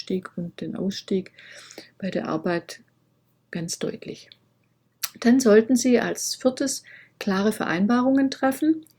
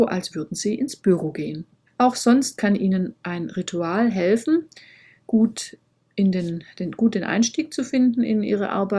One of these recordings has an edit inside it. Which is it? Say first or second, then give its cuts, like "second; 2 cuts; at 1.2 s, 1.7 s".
second; 1 cut; at 1.9 s